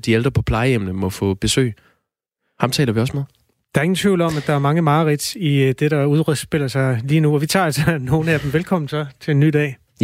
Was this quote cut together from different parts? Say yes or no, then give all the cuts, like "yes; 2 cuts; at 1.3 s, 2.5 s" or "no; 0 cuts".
no; 0 cuts